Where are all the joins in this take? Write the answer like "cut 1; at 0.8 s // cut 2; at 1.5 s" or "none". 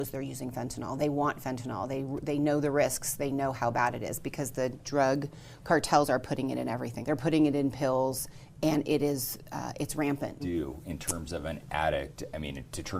cut 1; at 7.0 s // cut 2; at 10.4 s